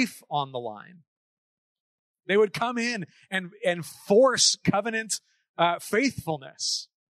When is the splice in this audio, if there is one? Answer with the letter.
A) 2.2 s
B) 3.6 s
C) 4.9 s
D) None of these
A